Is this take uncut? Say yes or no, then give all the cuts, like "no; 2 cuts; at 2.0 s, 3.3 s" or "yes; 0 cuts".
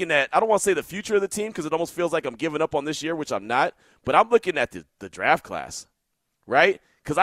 yes; 0 cuts